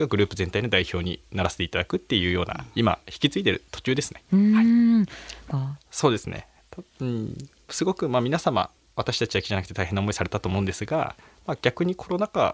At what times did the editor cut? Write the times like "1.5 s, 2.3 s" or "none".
5.5 s